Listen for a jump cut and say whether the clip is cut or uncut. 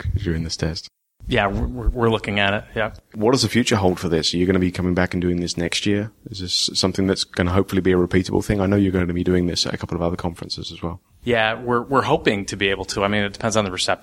uncut